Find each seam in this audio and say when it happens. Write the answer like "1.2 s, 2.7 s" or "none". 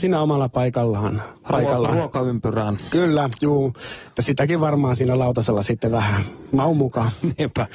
none